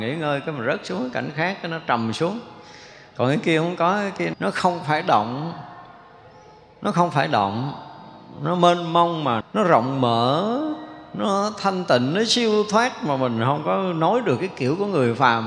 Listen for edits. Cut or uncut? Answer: cut